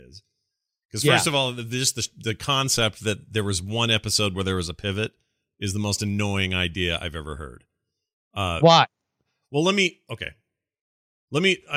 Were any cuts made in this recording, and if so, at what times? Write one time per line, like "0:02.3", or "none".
none

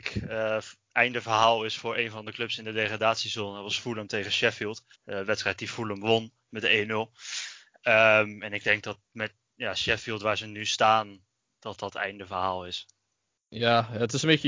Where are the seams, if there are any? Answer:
0:04.9

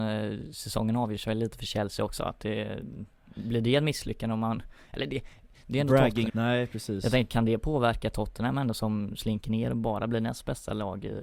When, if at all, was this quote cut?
0:02.2
0:06.3

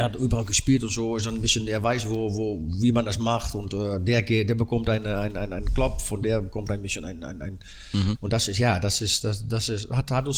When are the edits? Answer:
0:08.1

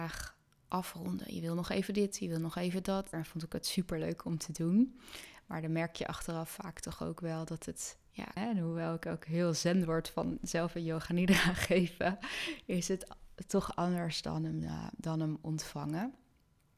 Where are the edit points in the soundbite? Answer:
0:03.1
0:08.4

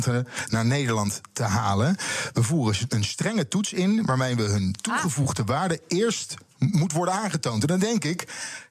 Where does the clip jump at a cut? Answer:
none

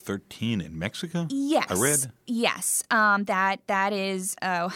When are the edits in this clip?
none

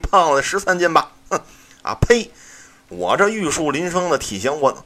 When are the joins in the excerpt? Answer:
none

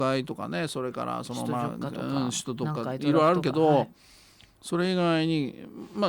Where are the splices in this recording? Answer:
none

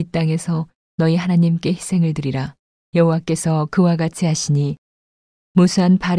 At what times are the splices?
0:02.8

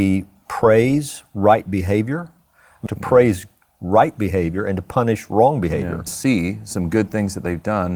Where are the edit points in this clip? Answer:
0:02.9
0:06.1

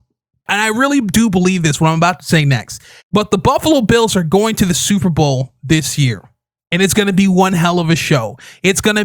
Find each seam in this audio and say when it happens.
0:03.0
0:06.6

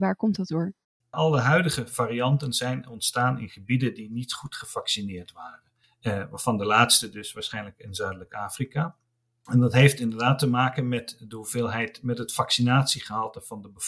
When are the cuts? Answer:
none

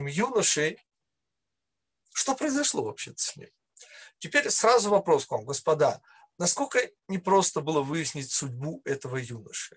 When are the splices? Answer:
none

